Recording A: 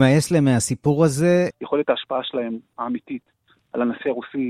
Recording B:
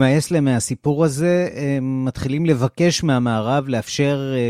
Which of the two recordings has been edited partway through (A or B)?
A